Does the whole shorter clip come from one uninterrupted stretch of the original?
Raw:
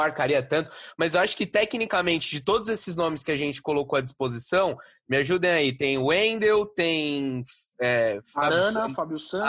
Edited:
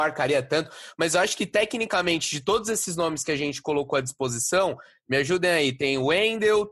yes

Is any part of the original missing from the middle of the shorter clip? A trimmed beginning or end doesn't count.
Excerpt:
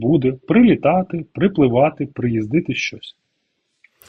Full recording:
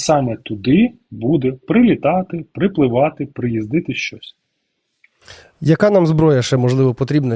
no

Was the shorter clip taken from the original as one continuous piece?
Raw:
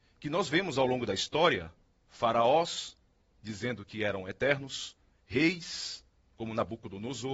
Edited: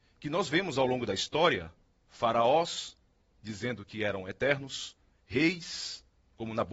yes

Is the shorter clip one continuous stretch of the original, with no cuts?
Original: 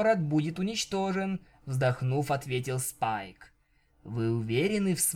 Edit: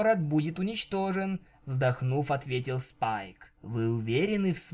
no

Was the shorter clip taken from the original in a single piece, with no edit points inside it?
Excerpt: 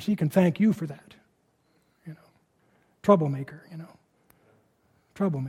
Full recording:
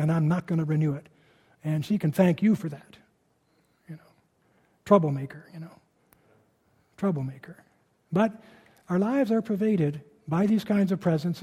yes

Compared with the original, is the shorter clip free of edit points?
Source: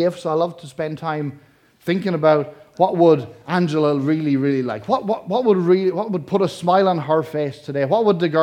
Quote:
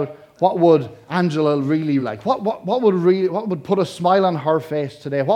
no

